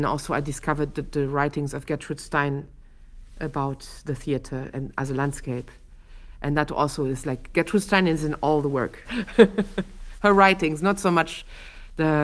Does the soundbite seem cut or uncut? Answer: cut